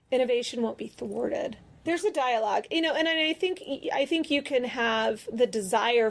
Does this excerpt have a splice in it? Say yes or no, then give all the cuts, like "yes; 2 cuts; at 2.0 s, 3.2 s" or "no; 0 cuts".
yes; 1 cut; at 1.9 s